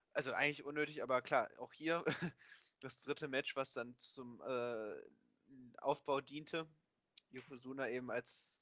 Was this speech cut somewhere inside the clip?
no; 0 cuts

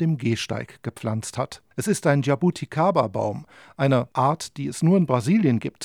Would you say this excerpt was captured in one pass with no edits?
no; 1 cut; at 1.7 s

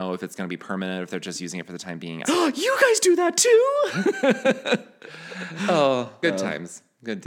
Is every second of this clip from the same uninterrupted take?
no; 2 cuts; at 2.2 s, 6.2 s

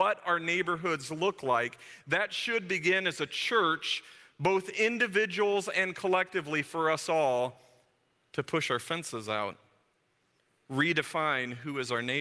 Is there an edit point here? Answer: no; 0 cuts

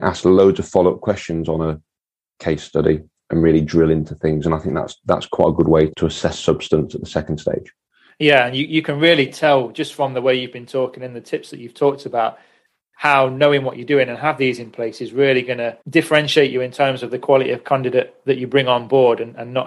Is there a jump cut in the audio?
yes; 2 cuts; at 5.9 s, 15.8 s

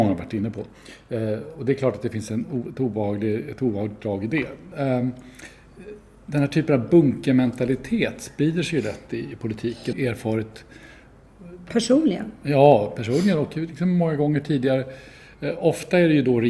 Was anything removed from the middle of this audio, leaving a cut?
yes; 2 cuts; at 4.7 s, 9.9 s

